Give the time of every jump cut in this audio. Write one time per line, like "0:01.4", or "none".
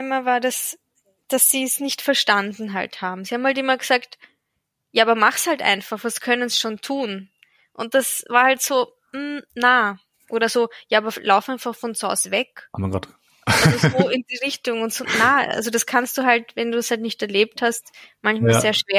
none